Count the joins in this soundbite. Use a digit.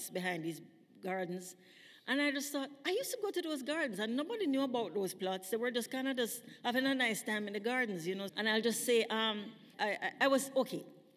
2